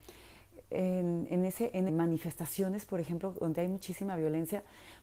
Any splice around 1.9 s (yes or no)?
yes